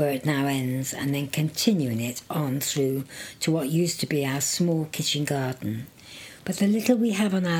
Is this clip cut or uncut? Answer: cut